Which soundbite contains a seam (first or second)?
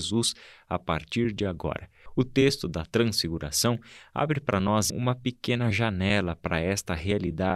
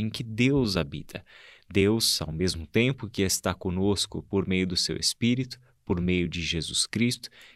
first